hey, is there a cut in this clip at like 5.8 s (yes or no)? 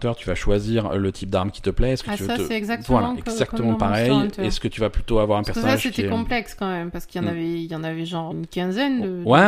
no